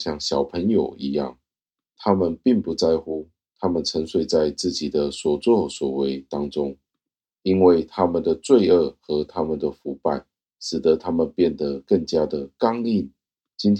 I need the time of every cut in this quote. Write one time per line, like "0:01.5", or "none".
none